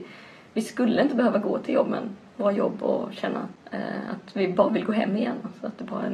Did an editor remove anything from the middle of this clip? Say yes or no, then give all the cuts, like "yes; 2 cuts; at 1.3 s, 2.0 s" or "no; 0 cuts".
no; 0 cuts